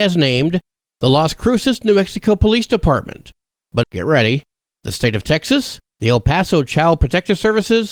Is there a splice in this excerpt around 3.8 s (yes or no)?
yes